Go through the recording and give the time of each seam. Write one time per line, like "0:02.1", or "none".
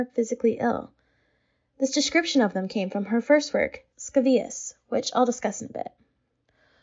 none